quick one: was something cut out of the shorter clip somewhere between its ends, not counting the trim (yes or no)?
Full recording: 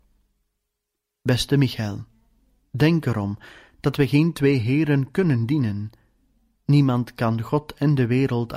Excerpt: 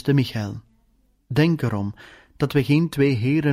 no